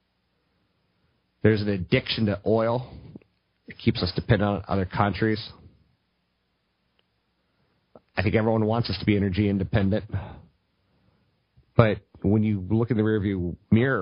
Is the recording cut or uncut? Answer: uncut